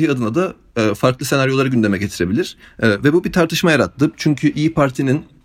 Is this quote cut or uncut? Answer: cut